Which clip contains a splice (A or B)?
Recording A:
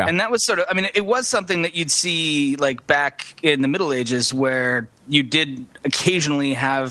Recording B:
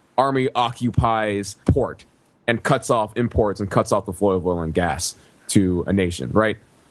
B